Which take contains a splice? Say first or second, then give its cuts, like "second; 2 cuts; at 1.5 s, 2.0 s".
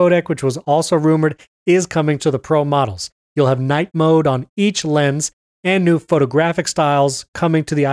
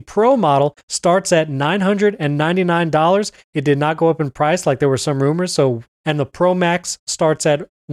second; 1 cut; at 5.9 s